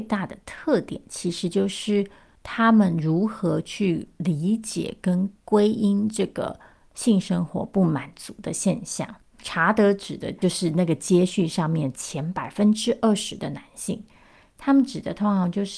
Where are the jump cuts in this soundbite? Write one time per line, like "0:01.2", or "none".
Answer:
0:09.3

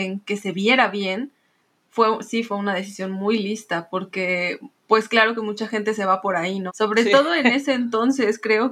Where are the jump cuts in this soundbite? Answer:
0:06.7

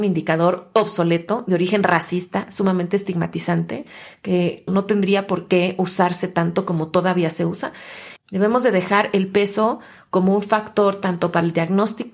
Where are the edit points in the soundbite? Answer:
0:04.7
0:08.2

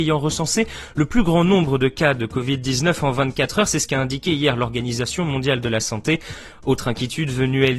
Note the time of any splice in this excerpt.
none

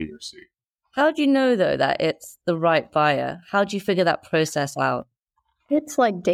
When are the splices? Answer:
none

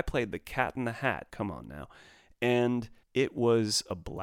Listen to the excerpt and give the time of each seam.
0:01.3
0:03.0

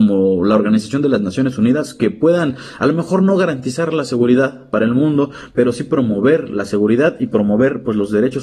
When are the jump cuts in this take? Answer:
none

